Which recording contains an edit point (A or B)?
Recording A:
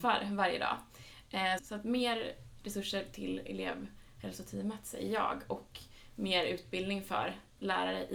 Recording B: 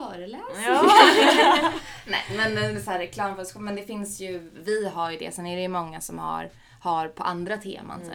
A